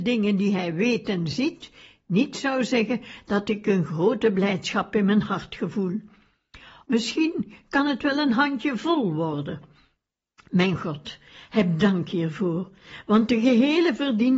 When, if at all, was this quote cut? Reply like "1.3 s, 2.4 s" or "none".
6.8 s